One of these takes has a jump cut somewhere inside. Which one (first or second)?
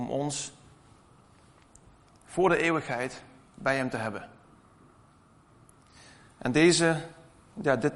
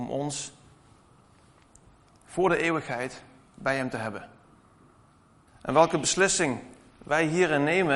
second